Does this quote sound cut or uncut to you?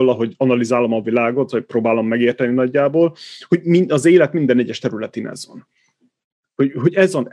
uncut